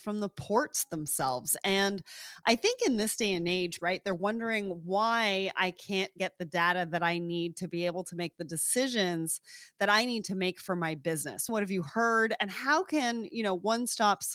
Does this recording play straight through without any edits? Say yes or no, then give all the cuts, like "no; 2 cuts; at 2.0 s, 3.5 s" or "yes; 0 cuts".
no; 2 cuts; at 3.8 s, 11.5 s